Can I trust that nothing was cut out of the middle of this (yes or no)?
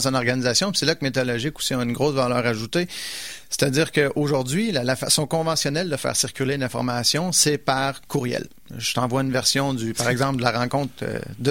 yes